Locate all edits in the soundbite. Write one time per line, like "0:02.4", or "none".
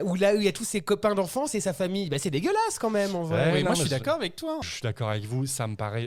none